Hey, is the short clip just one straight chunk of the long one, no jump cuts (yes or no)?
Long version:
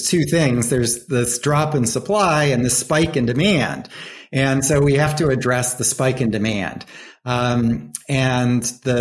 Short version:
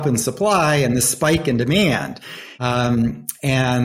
no